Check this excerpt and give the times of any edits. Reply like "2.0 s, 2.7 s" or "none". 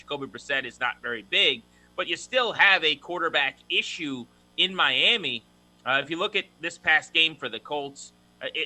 none